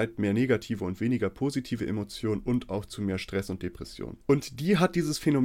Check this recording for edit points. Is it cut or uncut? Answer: cut